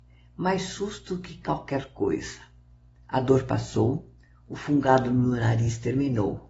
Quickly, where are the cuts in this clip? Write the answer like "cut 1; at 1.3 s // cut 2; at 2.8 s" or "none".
none